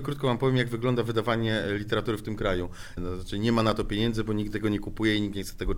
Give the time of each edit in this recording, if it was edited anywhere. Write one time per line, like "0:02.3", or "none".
0:03.0

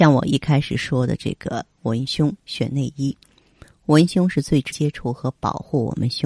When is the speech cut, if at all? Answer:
0:04.7

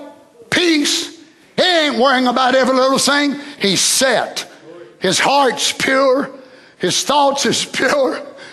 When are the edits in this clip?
0:01.6
0:03.6

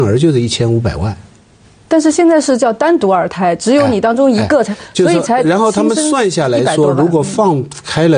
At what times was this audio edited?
none

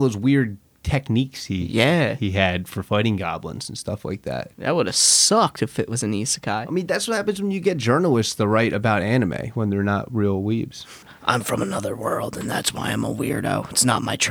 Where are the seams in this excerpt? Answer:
0:04.5
0:11.0

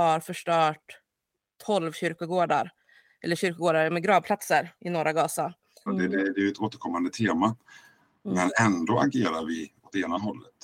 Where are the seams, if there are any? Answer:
0:05.9

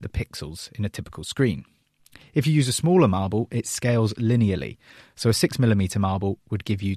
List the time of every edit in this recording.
none

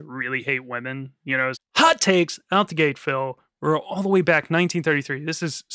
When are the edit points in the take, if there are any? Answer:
0:01.5

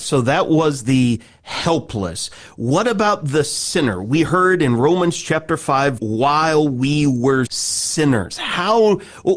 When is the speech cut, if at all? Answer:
0:06.0
0:07.5

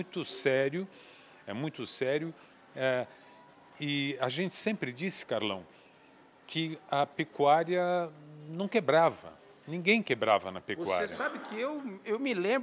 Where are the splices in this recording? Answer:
none

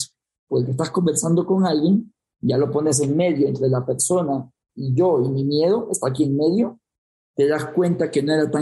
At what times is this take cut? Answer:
none

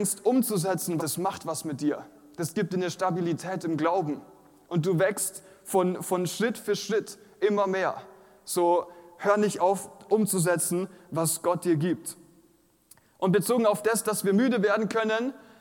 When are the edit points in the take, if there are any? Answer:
0:01.0

